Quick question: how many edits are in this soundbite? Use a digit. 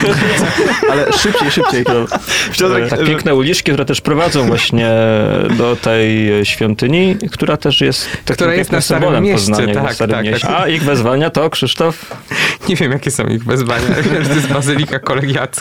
2